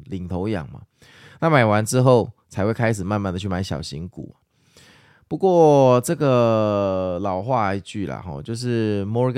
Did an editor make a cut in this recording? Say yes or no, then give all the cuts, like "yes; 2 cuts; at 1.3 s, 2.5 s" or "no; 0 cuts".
no; 0 cuts